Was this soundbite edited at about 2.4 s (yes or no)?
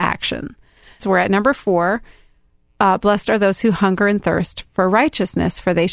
no